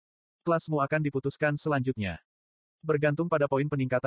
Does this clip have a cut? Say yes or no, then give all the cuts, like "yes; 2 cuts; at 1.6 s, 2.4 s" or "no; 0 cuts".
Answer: no; 0 cuts